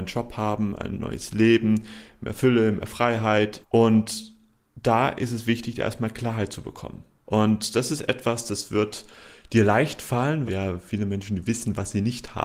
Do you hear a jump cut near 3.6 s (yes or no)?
yes